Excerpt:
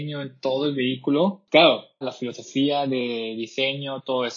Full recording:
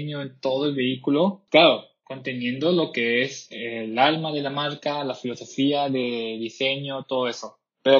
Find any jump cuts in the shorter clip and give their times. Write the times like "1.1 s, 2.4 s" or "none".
2.0 s

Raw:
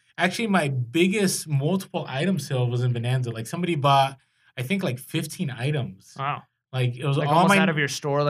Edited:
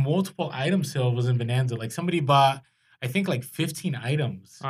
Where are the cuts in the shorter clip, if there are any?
none

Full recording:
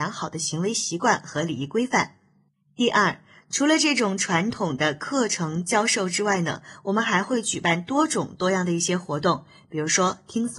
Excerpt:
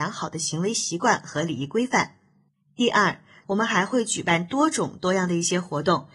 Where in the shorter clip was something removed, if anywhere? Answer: 3.4 s

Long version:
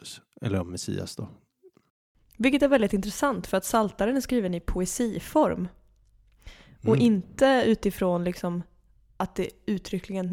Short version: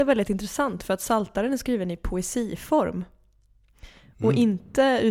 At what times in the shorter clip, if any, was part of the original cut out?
none

